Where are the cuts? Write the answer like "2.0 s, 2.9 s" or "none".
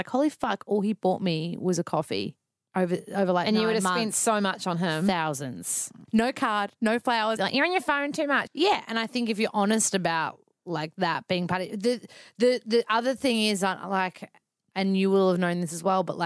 6.0 s, 7.4 s, 8.5 s